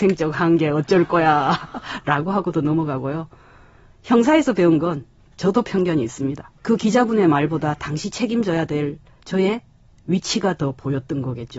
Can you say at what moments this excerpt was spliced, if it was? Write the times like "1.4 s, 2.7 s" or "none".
6.6 s